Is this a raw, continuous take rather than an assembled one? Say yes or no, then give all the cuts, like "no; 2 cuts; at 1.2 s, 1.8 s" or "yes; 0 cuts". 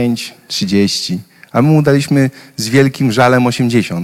yes; 0 cuts